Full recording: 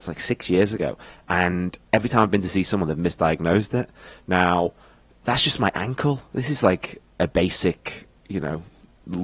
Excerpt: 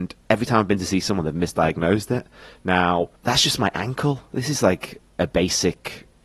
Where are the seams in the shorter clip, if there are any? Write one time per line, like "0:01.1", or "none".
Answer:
0:03.2